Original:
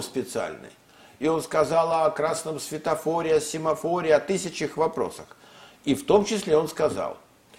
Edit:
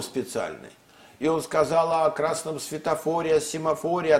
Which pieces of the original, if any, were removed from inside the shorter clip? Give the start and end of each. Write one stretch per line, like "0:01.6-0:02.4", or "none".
none